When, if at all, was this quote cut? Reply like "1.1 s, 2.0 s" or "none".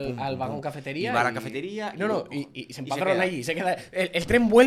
none

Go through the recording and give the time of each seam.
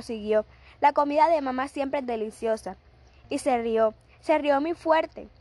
3.2 s

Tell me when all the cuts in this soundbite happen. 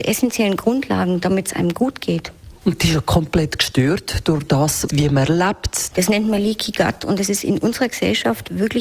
4.9 s, 5.9 s

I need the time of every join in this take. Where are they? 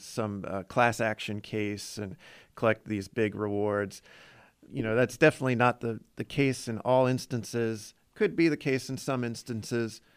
none

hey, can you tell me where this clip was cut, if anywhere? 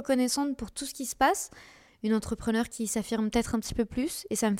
1.9 s

